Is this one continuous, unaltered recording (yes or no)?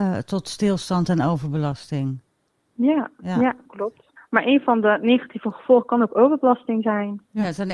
no